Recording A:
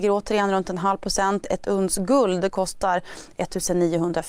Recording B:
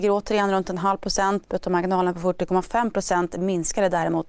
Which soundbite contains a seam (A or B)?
B